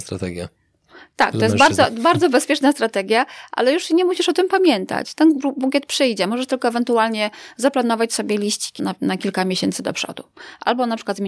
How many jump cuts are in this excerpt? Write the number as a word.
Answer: one